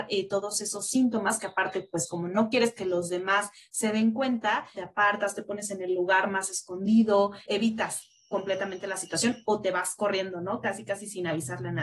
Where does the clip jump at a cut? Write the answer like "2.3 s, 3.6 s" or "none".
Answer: 4.7 s, 7.5 s